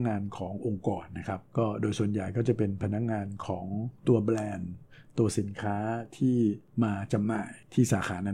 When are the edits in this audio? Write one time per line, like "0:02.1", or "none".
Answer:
0:04.0